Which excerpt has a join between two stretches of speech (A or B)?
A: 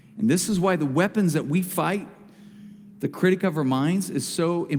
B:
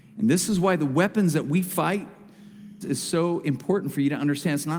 B